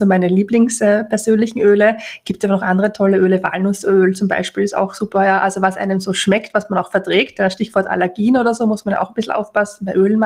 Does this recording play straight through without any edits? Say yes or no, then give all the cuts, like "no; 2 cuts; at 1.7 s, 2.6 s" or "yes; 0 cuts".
yes; 0 cuts